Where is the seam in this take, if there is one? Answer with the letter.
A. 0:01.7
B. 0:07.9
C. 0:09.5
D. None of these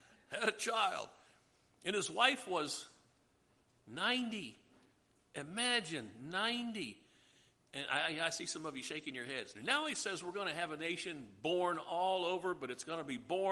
C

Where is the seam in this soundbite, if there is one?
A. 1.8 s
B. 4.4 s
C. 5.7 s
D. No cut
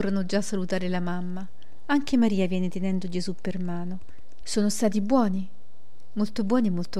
B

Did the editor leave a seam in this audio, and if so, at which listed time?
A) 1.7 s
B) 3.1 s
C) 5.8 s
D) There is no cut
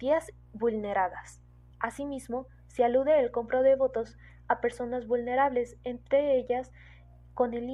A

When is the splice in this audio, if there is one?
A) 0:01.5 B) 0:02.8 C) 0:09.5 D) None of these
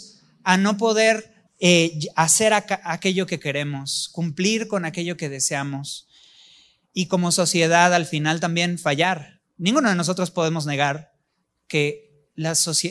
A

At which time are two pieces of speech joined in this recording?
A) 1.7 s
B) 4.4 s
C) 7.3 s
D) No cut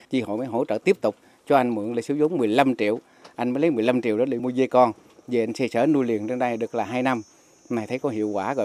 B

